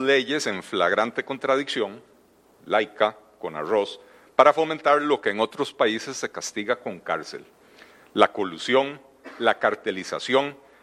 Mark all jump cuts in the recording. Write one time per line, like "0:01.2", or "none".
none

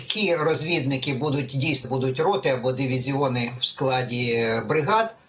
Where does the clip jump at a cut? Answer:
0:01.8

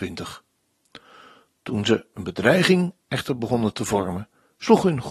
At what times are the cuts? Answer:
0:01.5

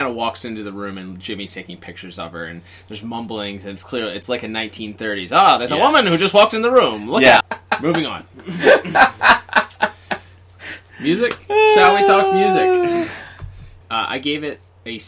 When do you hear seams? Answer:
0:07.4
0:13.8

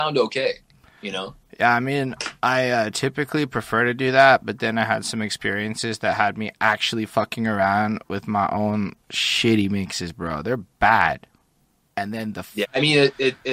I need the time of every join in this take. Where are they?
0:09.0
0:12.6

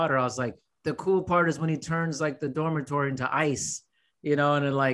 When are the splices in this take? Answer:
none

